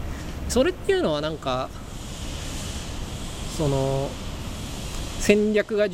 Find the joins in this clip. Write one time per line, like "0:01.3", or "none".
none